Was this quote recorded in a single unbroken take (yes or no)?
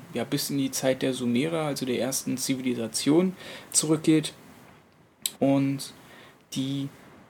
no